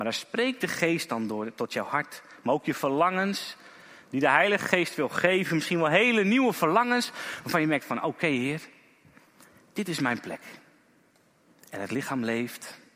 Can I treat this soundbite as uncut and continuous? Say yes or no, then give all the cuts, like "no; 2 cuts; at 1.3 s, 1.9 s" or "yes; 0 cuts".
yes; 0 cuts